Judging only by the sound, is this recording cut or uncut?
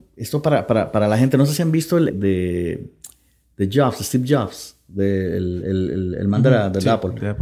cut